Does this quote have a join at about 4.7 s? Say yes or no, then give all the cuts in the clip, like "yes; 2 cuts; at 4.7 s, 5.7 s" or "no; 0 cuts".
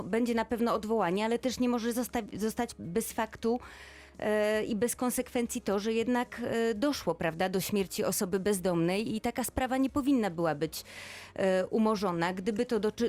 no; 0 cuts